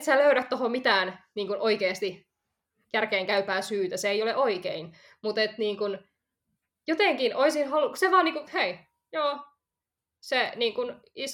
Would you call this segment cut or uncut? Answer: cut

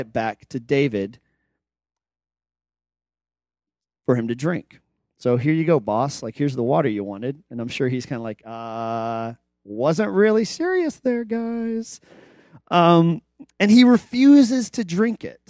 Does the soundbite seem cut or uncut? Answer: uncut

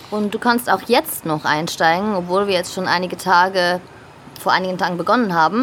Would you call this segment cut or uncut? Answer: cut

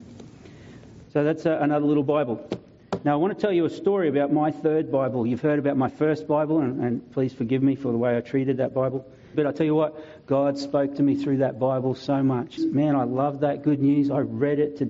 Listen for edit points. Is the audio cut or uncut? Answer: cut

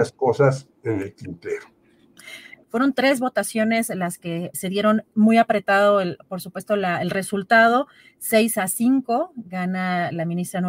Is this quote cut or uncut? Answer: cut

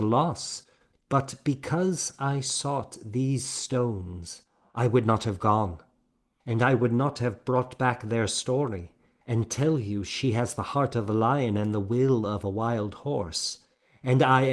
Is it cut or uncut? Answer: cut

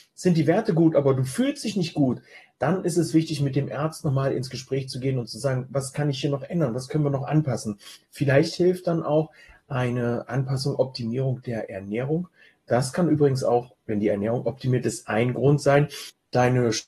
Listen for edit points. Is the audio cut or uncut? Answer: uncut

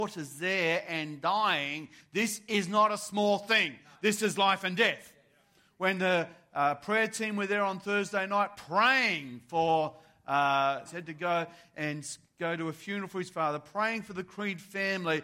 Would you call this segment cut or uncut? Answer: cut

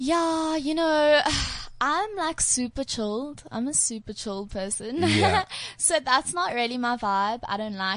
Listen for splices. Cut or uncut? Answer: uncut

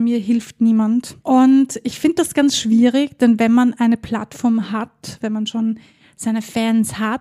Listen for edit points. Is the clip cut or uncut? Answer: cut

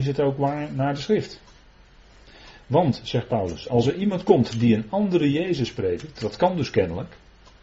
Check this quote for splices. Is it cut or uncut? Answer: uncut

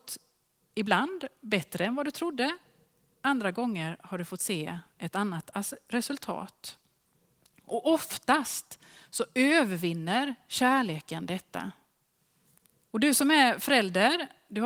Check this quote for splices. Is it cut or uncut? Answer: cut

